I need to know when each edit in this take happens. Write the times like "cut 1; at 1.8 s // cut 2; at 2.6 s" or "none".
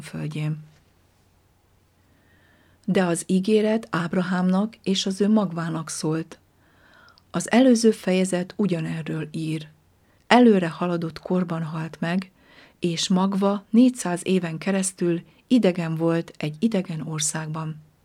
cut 1; at 10.2 s